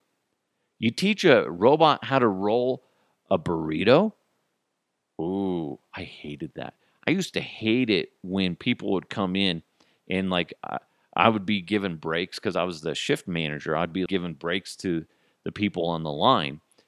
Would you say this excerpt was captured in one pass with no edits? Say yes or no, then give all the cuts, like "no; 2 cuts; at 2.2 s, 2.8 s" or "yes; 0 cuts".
no; 1 cut; at 14.1 s